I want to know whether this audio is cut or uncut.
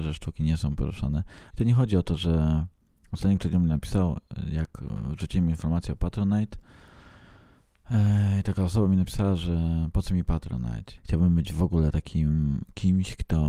cut